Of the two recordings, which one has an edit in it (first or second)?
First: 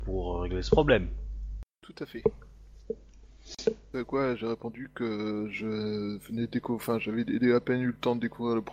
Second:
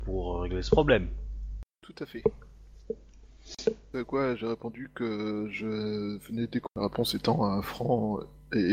second